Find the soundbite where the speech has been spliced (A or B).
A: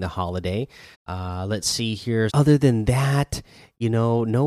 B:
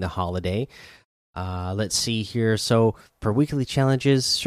A